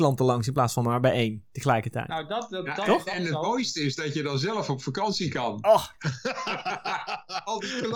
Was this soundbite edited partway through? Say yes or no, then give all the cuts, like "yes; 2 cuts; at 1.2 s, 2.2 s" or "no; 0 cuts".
no; 0 cuts